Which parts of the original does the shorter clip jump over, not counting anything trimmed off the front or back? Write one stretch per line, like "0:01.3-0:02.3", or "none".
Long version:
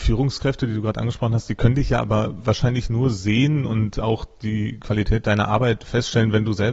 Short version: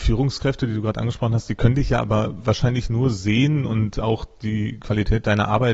none